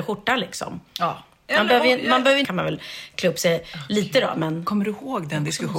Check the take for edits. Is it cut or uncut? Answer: cut